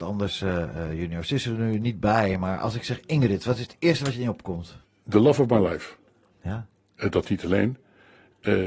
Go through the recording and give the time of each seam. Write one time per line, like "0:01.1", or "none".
none